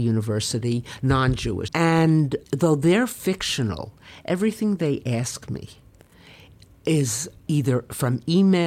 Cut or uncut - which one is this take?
cut